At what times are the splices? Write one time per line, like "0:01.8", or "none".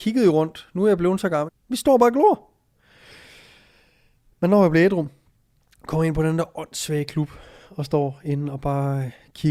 0:01.5